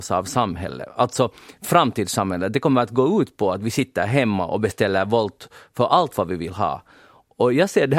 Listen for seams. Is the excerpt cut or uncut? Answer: uncut